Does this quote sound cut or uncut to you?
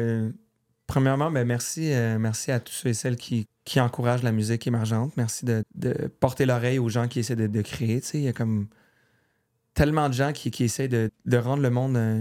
cut